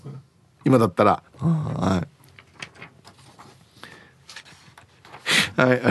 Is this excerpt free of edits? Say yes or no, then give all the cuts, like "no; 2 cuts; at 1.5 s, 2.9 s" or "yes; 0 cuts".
no; 2 cuts; at 1.3 s, 4.4 s